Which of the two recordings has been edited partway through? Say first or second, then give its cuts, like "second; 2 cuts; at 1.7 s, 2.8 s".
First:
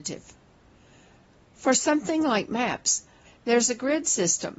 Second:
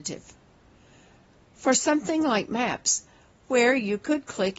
first; 1 cut; at 3.2 s